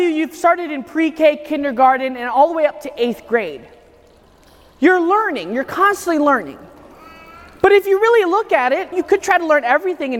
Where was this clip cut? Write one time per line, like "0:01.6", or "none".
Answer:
0:08.9

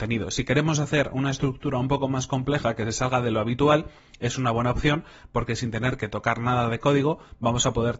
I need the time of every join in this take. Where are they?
none

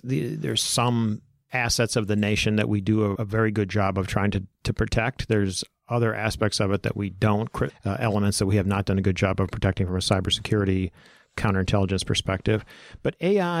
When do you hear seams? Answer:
0:03.2
0:07.7

